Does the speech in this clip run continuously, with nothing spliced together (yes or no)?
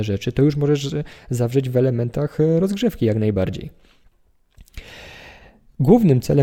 yes